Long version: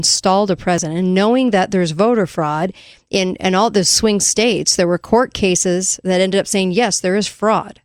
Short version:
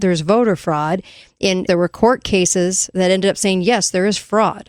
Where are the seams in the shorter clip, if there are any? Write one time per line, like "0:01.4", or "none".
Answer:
0:01.7